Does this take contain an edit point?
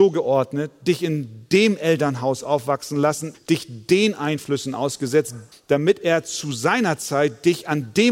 yes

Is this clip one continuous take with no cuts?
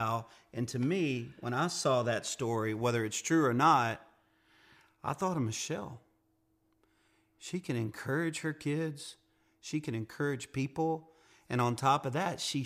yes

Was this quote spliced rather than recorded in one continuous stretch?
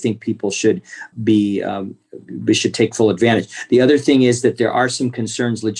no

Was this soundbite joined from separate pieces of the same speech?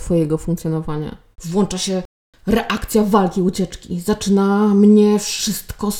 yes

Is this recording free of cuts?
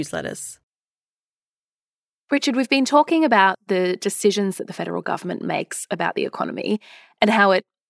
yes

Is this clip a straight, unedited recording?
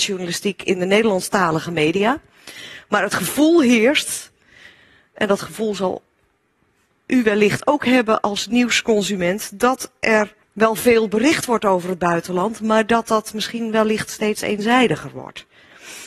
no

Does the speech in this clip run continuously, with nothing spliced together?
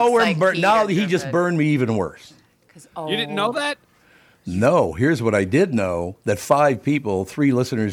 yes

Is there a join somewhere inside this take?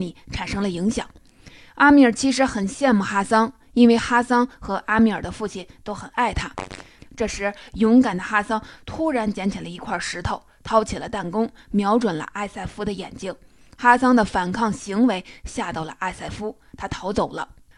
yes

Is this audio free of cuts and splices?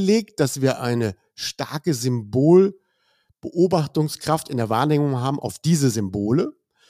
yes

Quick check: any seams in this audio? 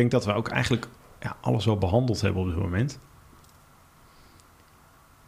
no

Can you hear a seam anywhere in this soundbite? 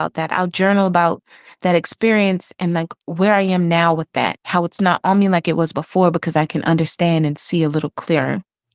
no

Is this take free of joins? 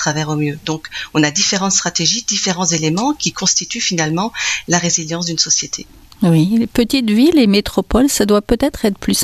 yes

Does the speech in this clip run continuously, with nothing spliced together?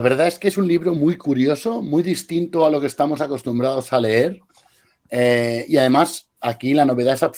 yes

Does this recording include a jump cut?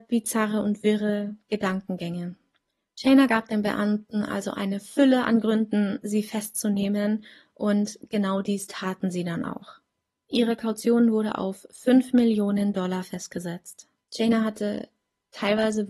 yes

